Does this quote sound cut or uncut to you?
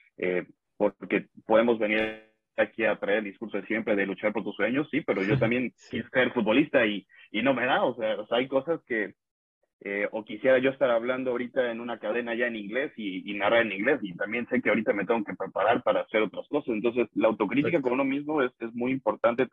uncut